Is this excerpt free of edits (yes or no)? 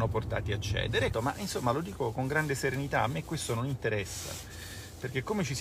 no